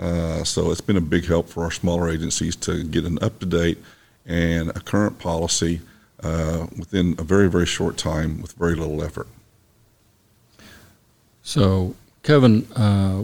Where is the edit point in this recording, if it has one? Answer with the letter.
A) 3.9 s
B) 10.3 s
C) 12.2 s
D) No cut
D